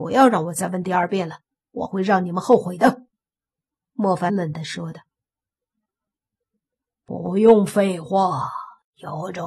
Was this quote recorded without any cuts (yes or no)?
no